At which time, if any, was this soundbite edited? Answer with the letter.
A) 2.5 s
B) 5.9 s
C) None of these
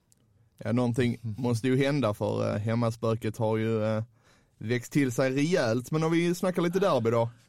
A